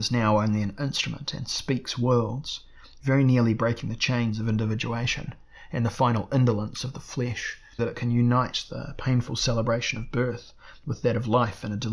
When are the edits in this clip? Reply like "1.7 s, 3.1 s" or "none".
7.8 s